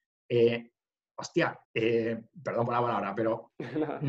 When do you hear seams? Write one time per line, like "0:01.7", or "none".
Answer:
0:01.6